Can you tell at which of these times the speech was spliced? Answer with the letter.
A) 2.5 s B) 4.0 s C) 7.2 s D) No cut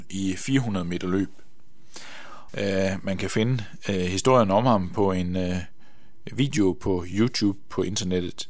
A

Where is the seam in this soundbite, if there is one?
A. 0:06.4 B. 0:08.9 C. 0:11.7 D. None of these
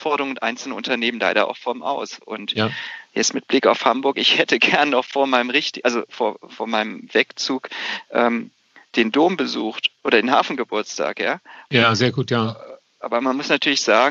C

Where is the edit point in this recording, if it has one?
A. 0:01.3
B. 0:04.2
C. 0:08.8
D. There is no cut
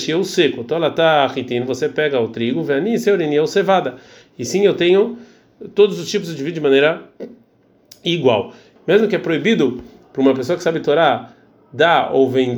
C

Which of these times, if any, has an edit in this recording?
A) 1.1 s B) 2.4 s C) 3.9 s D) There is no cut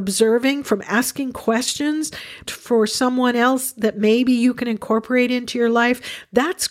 B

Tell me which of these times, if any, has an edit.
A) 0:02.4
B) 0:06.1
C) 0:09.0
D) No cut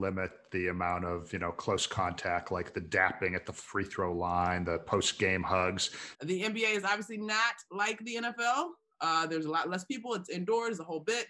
B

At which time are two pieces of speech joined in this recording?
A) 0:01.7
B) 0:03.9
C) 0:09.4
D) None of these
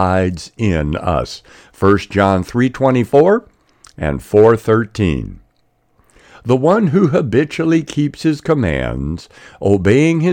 D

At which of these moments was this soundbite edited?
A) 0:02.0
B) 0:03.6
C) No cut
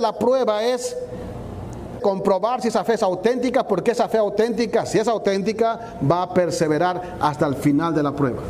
A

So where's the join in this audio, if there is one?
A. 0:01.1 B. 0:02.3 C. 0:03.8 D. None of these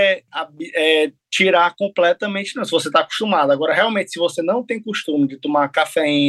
D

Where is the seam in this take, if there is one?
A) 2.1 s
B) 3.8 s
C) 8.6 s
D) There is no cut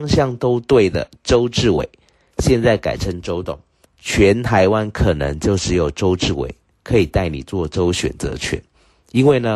B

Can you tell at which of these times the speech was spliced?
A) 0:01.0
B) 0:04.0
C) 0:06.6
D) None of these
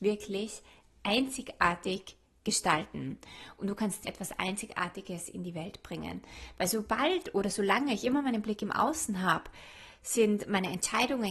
B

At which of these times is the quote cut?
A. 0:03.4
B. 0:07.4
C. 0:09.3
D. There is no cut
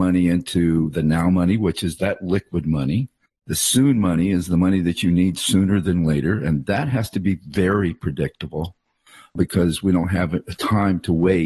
D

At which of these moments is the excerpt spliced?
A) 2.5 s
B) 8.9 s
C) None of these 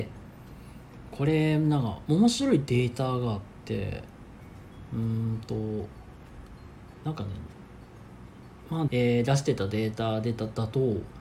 B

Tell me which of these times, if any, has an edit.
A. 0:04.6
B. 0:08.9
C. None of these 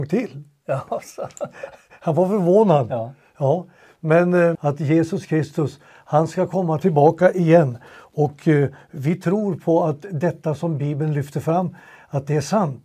A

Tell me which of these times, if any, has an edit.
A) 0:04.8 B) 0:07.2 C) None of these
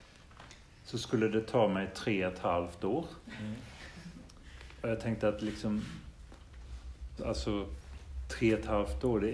B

